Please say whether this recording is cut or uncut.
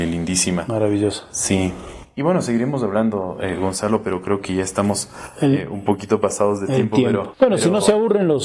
uncut